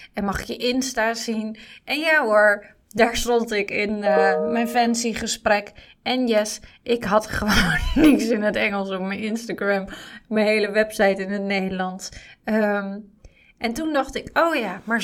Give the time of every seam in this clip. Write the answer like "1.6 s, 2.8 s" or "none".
none